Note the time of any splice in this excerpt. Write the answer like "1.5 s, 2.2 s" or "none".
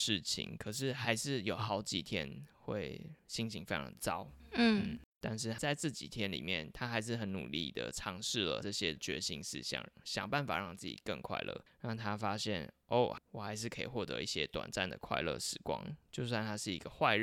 13.2 s